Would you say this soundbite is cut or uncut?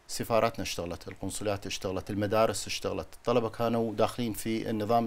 uncut